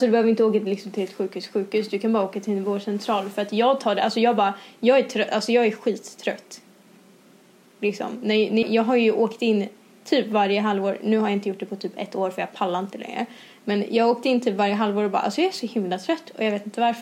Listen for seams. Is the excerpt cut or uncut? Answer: cut